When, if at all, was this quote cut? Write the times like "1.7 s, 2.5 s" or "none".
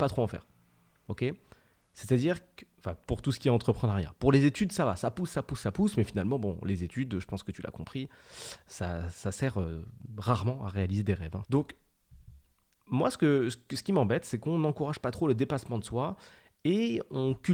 11.4 s